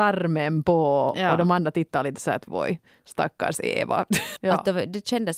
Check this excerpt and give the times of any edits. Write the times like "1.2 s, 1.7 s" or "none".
2.5 s, 4.4 s